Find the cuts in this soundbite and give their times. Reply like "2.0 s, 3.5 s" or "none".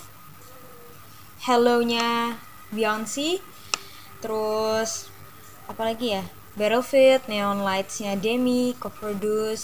none